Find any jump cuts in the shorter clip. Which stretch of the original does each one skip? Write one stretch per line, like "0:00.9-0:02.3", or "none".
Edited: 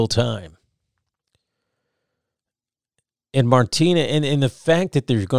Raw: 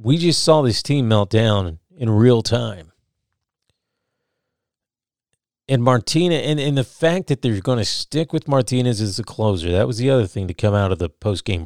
none